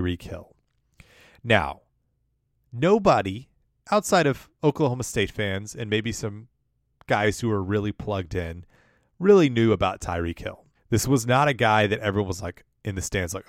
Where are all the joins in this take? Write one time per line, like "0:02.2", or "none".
0:10.7